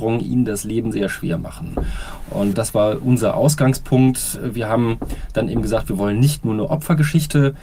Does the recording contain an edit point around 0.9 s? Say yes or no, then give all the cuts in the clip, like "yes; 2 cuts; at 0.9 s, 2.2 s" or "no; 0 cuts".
yes; 1 cut; at 0.9 s